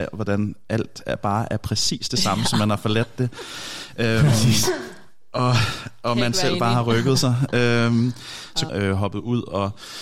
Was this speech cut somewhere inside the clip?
yes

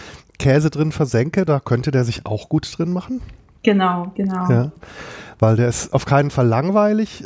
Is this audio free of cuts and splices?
yes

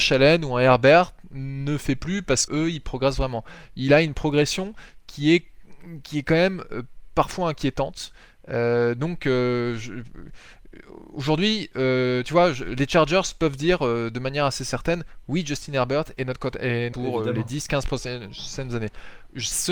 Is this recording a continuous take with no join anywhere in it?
no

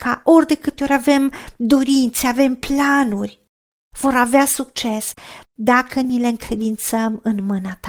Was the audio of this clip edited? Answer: yes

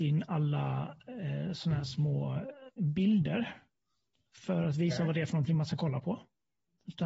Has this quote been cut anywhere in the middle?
no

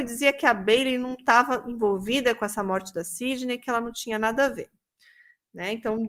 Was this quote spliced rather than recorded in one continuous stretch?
no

